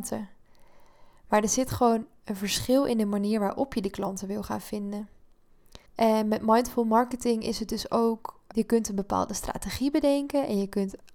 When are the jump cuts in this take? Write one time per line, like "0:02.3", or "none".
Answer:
0:05.9
0:08.5